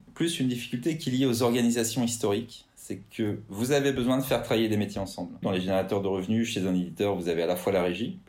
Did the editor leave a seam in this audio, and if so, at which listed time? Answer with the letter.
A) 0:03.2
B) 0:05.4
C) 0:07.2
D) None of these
B